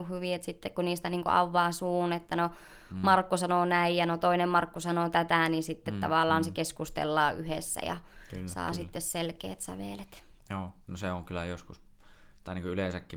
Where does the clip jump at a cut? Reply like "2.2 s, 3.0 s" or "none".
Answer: none